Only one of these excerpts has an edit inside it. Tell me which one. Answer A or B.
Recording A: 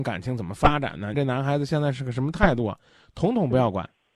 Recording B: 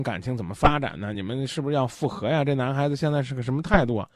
A